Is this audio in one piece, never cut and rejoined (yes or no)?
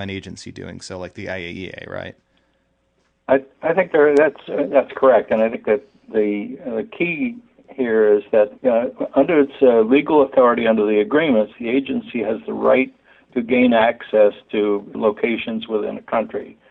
no